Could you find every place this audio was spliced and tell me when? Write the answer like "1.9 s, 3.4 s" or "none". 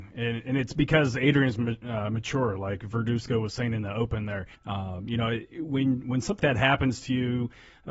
4.5 s, 6.4 s